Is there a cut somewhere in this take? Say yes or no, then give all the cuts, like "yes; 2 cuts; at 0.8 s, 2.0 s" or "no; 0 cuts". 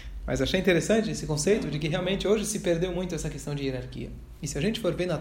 no; 0 cuts